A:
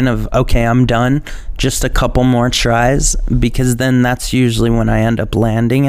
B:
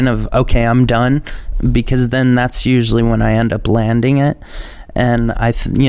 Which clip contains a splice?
B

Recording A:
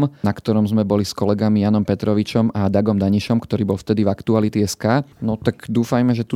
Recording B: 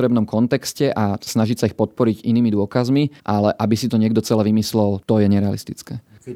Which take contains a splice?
A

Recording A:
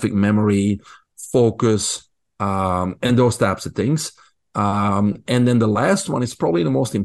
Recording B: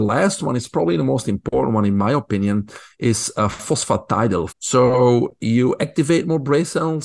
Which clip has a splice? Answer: B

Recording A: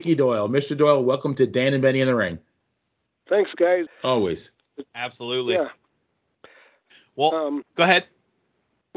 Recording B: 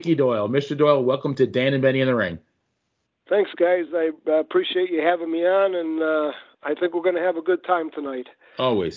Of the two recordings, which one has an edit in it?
A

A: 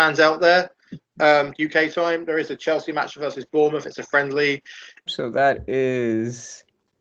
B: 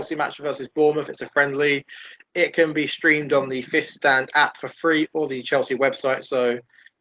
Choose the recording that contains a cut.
A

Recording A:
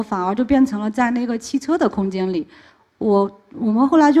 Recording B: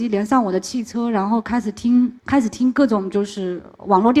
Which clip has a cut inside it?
B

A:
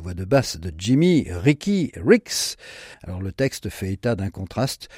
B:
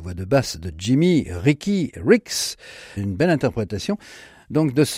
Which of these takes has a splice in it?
A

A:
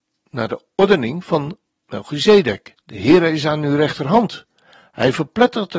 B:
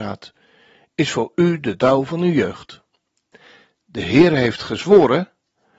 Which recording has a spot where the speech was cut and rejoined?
A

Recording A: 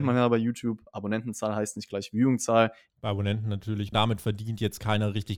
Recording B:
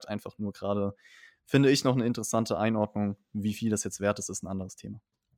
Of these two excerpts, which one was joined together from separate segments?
A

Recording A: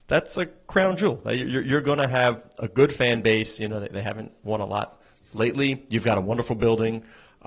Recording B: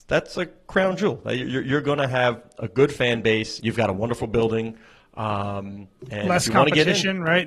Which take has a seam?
B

